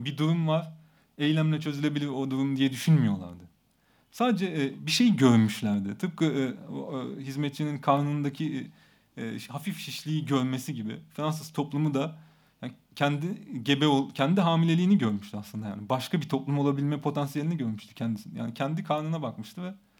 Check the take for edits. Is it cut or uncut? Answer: uncut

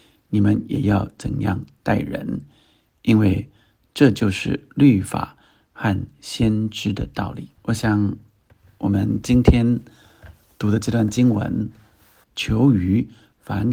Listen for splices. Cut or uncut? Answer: cut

